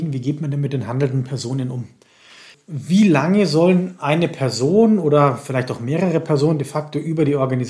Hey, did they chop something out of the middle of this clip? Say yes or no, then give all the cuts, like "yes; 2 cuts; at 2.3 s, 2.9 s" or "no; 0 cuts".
no; 0 cuts